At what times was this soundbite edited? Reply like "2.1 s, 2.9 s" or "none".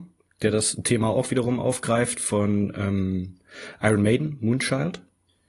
none